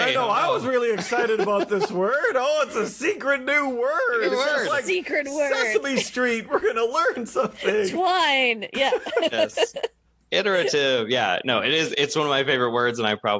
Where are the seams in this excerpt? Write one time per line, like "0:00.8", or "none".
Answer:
none